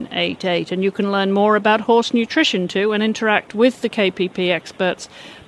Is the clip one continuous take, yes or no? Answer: yes